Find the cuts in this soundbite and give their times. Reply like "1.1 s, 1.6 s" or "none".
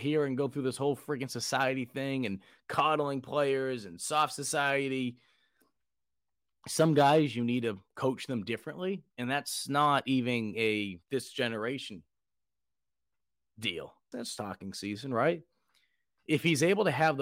14.1 s